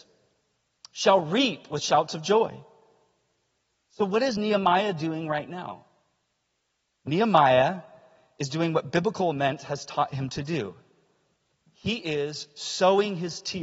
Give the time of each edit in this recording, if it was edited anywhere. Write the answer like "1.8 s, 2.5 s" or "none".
none